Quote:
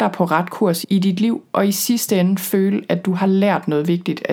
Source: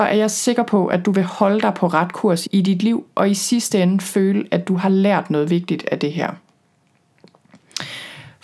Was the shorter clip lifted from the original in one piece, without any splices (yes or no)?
yes